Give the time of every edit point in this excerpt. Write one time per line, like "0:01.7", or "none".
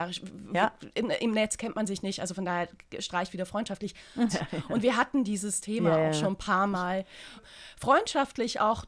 0:04.3
0:07.4